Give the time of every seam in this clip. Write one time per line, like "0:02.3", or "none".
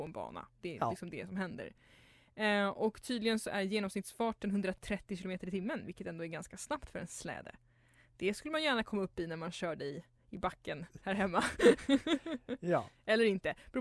none